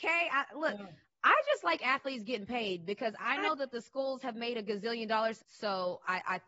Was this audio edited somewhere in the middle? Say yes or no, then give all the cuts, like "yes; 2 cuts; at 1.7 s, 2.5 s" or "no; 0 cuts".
yes; 1 cut; at 5.4 s